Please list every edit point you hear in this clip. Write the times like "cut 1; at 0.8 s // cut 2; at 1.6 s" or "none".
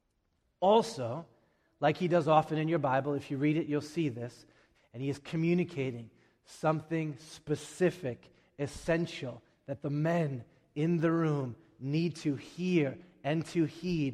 cut 1; at 4.7 s